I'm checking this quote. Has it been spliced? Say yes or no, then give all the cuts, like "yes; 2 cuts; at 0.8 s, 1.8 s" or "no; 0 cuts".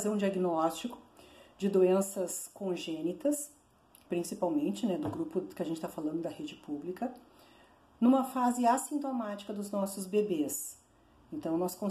yes; 1 cut; at 4.1 s